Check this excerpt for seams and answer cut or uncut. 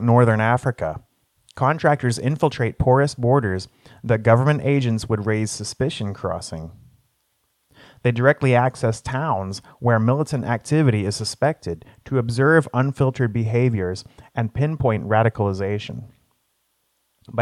uncut